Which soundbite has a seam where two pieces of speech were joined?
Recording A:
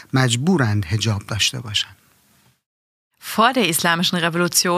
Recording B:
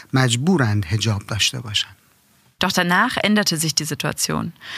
B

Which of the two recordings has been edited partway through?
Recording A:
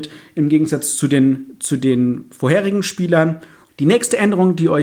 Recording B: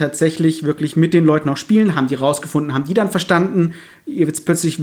A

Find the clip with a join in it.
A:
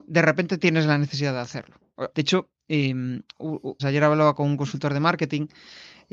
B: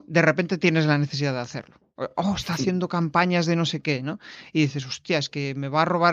A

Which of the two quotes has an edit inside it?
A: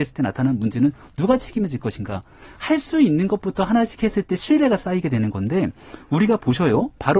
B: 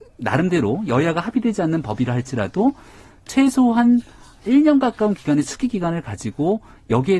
A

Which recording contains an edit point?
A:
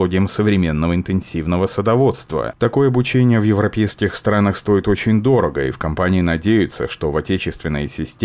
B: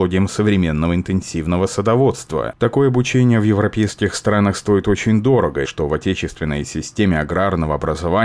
B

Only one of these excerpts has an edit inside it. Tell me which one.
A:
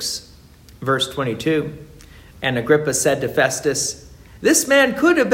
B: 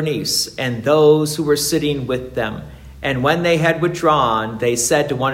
A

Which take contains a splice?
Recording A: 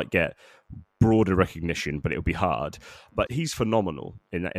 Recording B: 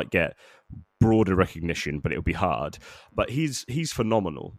A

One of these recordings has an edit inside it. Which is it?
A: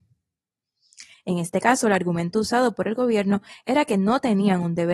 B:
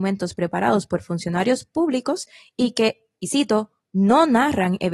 A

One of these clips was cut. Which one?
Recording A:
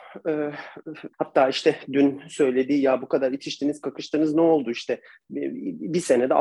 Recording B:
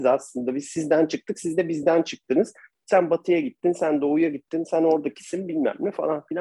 A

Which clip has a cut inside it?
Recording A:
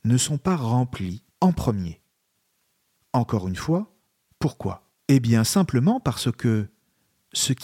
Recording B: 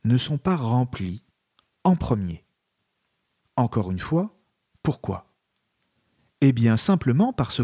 A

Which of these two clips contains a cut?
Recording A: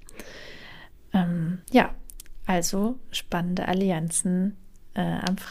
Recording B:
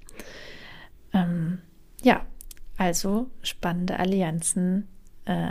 A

